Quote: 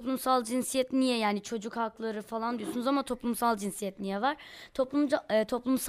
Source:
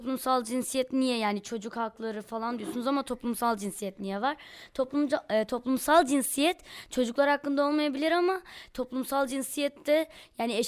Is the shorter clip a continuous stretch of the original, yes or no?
yes